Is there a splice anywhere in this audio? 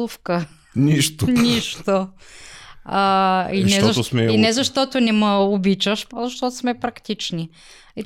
yes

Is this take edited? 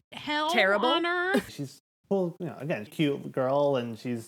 yes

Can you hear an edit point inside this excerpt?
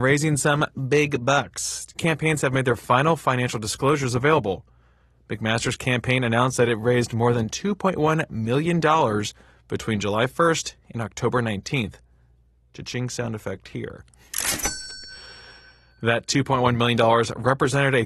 no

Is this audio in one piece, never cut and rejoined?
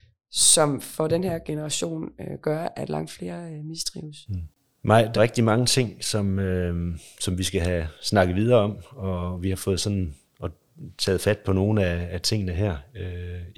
no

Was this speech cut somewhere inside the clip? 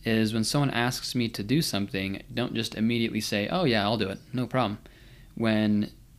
no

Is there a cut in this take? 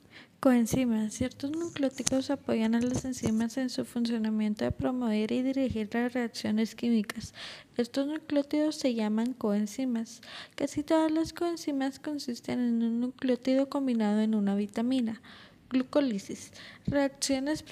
no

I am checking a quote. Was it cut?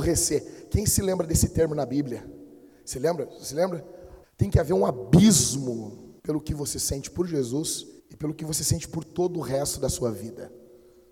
yes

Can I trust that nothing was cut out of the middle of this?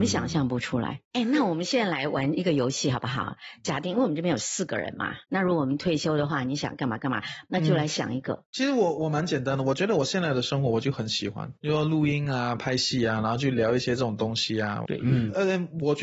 no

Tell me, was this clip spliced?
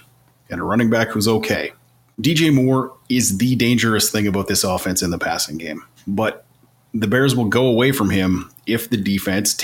yes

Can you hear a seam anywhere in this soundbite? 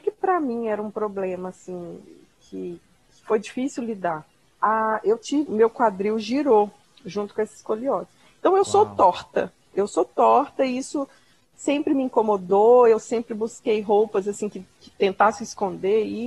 yes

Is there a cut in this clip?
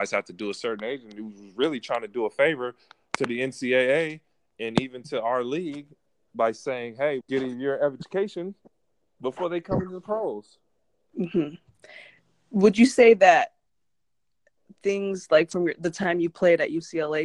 yes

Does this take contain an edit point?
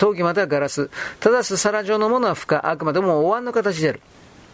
no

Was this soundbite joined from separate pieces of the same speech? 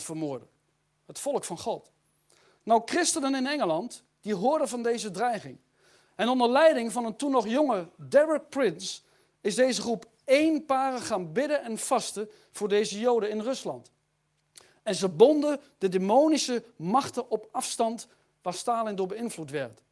no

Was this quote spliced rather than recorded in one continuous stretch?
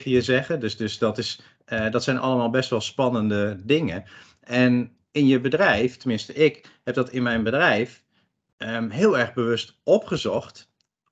no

